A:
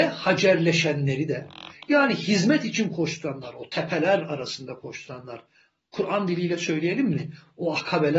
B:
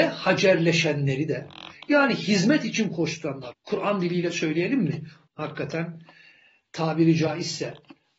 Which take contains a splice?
B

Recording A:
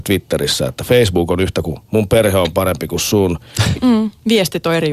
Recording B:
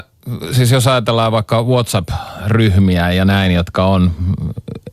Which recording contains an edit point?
A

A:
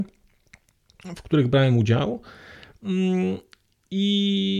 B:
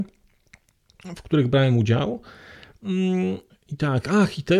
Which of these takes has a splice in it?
B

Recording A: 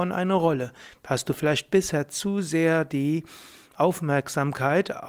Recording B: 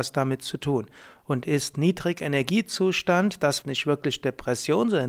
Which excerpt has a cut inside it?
B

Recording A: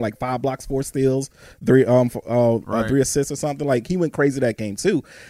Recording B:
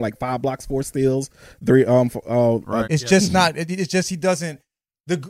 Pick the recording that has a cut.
B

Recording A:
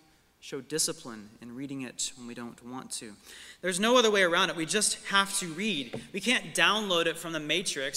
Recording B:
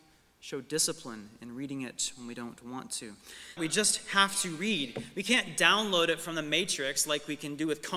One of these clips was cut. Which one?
B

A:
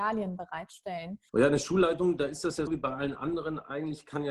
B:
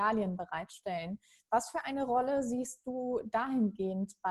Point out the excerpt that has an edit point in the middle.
A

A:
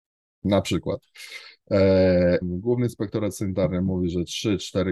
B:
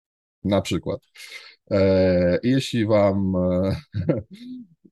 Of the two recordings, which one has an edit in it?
A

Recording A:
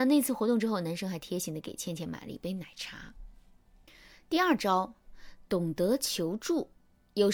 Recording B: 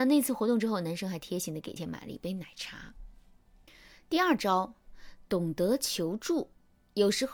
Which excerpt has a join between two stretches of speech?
B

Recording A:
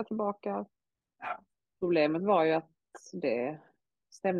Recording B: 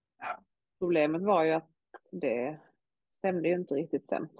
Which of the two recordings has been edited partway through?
A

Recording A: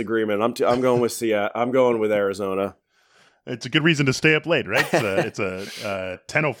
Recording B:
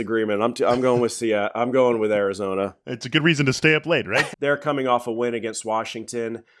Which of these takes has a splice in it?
B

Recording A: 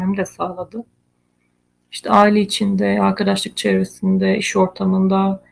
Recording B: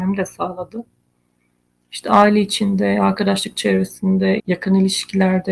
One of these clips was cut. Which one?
B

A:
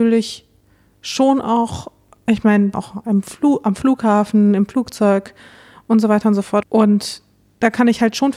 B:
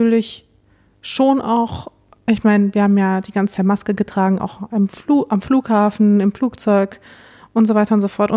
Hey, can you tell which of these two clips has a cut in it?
A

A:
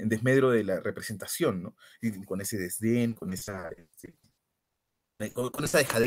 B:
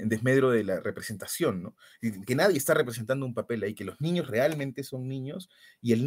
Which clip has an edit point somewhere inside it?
A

